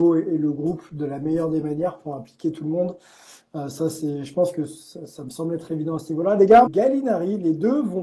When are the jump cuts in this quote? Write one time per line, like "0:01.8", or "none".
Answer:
0:06.7